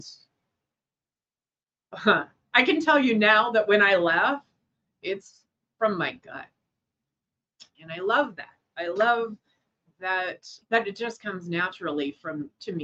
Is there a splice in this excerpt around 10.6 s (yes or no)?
yes